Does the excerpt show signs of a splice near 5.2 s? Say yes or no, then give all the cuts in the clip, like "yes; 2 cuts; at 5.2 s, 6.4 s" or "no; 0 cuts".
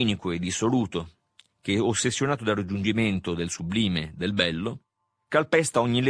no; 0 cuts